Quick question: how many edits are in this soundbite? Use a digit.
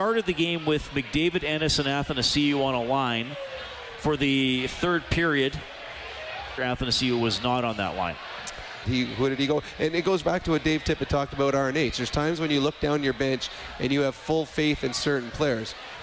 2